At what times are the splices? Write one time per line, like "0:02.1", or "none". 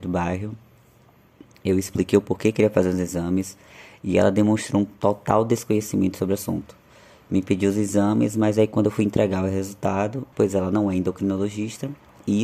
0:10.3